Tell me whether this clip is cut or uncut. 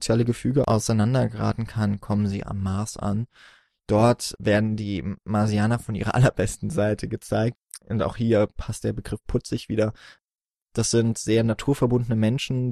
uncut